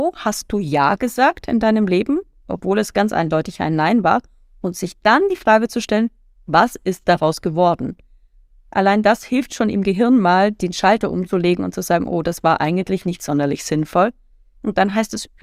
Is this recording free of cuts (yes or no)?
yes